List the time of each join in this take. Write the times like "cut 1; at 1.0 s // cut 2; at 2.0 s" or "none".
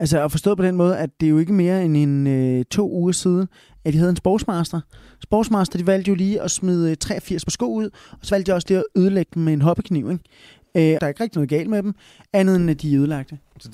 cut 1; at 11.0 s